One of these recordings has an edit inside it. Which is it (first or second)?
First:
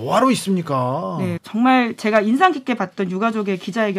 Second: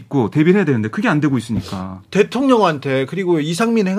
first